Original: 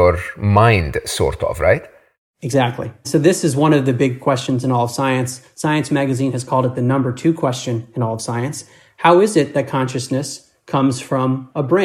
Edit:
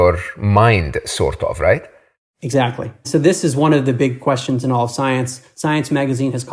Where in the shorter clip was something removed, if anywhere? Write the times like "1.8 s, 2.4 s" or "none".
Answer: none